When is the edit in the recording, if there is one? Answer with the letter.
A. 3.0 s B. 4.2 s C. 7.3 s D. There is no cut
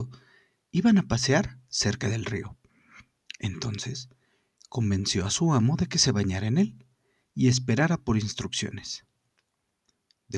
D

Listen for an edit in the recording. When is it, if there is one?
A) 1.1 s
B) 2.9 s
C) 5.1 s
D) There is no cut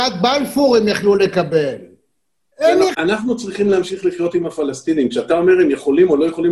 B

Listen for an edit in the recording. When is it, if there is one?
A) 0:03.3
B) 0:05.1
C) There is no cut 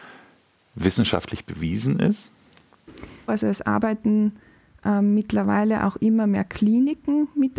A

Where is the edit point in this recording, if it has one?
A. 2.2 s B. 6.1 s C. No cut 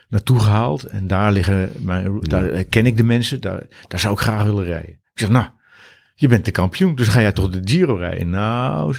C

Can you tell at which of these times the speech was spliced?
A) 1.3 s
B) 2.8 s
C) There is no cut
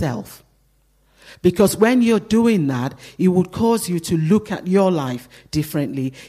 C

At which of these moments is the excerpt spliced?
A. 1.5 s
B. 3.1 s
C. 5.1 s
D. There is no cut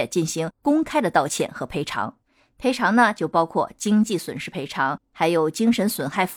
D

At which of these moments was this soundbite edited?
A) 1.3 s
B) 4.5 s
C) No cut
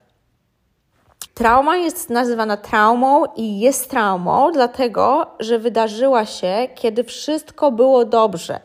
A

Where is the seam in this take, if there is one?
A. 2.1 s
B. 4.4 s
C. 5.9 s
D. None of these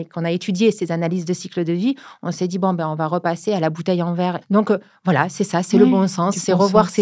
B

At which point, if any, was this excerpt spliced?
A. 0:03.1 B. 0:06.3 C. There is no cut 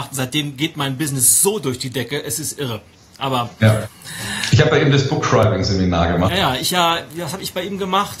B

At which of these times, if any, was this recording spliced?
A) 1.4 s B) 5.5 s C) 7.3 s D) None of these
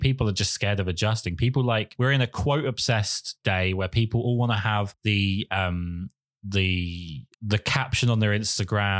C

